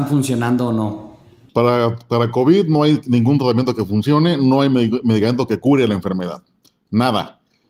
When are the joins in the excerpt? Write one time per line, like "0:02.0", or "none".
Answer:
none